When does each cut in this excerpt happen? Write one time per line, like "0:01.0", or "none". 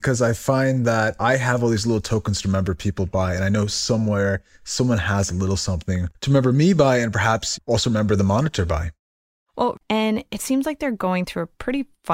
0:09.8